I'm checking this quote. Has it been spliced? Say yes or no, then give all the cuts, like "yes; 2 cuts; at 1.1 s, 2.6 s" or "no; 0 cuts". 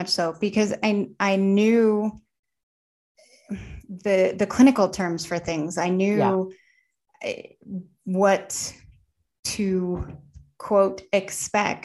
no; 0 cuts